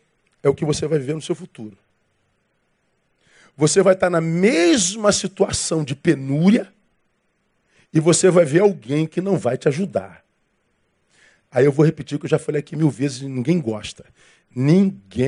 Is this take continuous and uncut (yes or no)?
yes